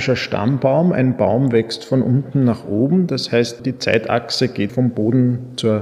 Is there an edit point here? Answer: yes; 2 cuts; at 3.6 s, 4.7 s

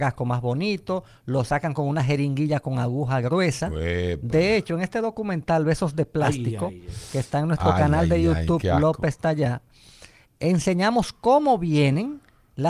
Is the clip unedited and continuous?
yes; 0 cuts

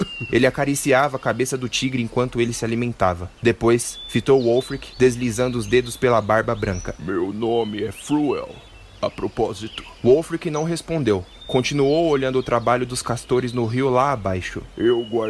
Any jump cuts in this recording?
no; 0 cuts

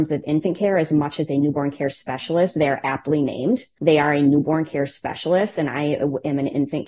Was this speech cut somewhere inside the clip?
no; 0 cuts

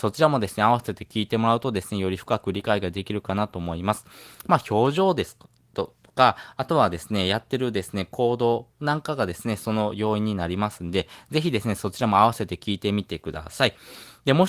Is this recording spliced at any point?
no; 0 cuts

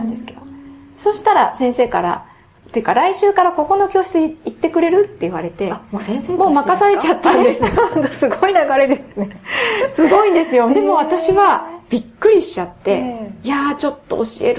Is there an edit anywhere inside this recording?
no; 0 cuts

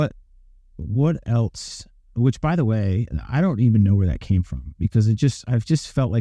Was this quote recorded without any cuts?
yes; 0 cuts

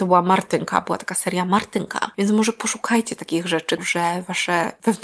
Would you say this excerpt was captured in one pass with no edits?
no; 2 cuts; at 2.1 s, 3.8 s

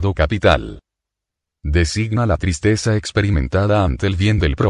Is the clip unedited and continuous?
yes; 0 cuts

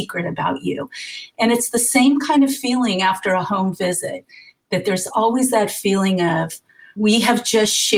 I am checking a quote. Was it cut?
no; 0 cuts

